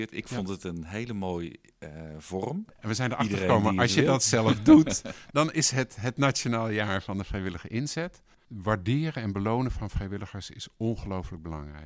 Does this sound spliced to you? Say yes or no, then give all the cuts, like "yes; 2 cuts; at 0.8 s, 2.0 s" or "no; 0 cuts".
yes; 1 cut; at 2.8 s